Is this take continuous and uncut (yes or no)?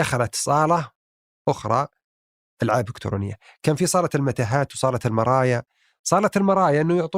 yes